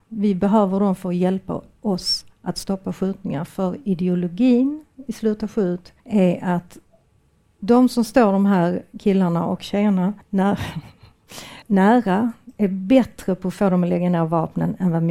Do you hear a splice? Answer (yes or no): yes